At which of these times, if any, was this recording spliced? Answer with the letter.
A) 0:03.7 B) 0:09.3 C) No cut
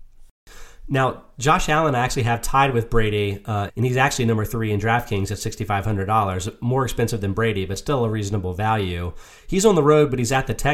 A